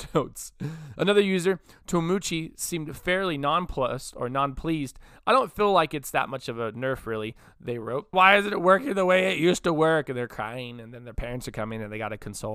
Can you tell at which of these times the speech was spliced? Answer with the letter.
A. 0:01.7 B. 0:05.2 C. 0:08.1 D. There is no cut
C